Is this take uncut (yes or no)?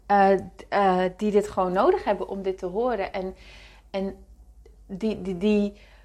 yes